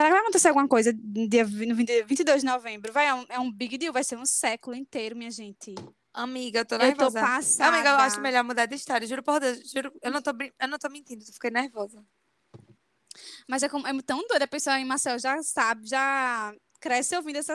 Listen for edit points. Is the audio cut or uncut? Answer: uncut